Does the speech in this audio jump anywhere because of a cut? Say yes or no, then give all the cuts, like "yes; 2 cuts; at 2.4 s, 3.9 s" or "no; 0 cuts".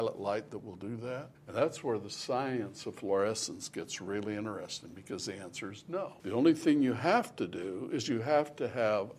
yes; 2 cuts; at 1.4 s, 6.2 s